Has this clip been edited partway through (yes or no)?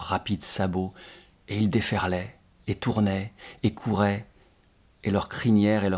no